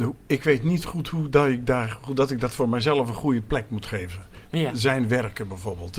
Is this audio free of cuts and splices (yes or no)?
yes